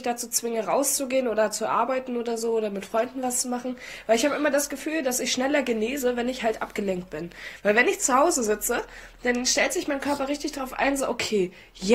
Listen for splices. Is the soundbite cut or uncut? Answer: uncut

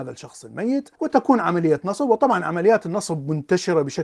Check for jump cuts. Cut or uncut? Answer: cut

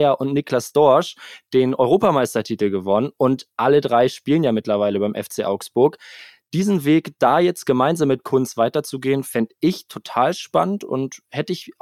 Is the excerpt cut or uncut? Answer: uncut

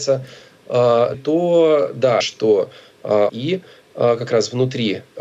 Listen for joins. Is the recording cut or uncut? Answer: cut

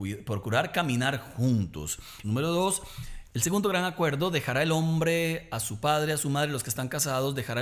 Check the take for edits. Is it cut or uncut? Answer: cut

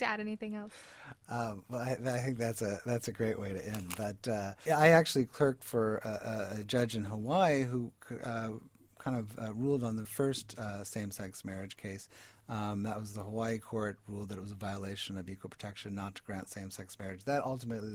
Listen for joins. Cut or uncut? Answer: cut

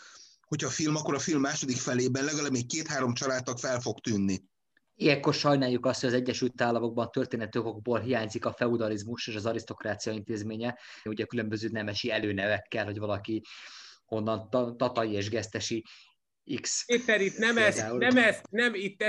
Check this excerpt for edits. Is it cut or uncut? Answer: cut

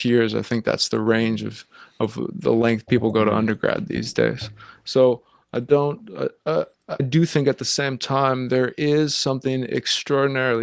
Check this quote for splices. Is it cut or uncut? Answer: cut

